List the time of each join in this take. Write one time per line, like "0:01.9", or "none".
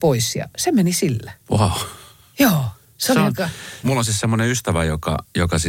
0:01.4
0:03.8